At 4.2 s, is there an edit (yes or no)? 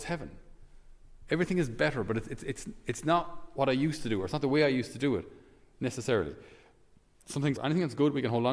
no